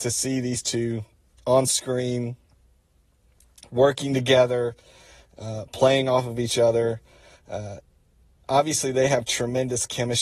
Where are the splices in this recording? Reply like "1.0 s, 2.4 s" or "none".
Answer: none